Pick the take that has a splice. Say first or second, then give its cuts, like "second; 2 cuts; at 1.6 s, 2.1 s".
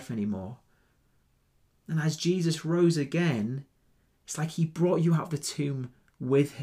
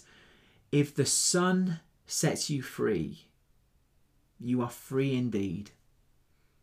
first; 1 cut; at 4.1 s